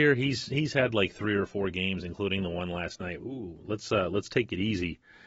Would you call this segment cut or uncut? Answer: cut